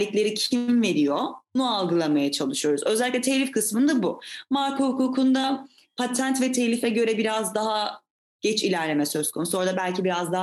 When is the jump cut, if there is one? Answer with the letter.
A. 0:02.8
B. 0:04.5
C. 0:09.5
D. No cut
D